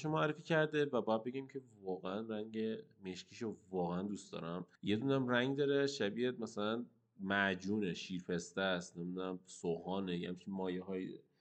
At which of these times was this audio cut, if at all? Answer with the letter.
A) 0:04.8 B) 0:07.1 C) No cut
A